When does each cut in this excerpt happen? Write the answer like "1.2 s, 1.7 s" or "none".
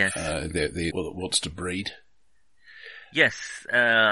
0.9 s